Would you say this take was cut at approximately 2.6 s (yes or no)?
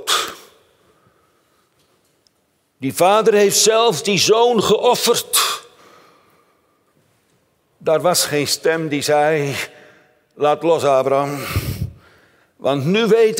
no